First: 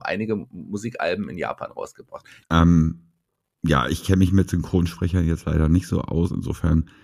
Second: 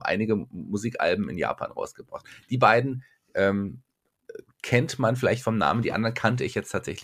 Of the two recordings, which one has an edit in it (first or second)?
first